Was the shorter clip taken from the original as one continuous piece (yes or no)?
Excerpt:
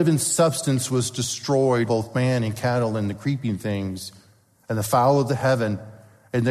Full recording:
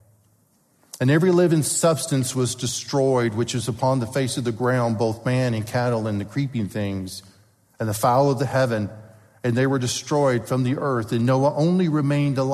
no